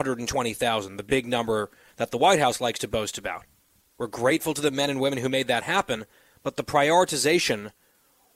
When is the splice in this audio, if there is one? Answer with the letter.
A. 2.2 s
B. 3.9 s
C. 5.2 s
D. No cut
B